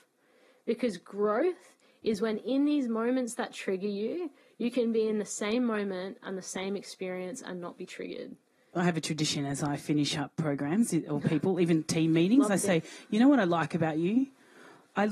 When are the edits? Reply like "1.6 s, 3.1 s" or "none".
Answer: 8.8 s